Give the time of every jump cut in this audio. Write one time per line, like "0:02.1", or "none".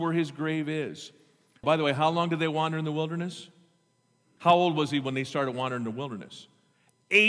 0:01.6
0:04.4